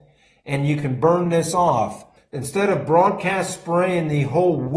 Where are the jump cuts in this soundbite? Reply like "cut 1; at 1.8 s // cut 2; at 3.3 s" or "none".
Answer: cut 1; at 2.2 s